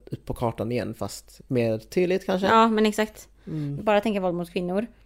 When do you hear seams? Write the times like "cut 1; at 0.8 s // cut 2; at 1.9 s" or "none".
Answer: cut 1; at 1.5 s // cut 2; at 3.8 s